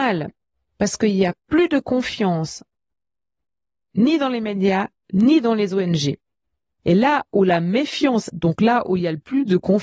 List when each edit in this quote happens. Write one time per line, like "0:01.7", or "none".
0:05.0
0:08.3